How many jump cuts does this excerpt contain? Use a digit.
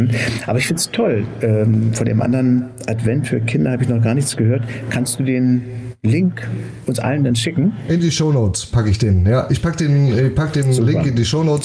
0